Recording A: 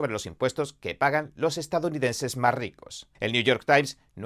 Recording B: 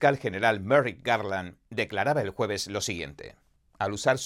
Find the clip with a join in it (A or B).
A